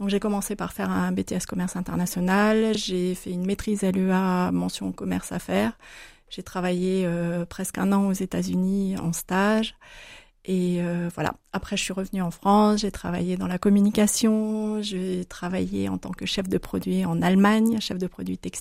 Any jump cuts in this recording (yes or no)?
no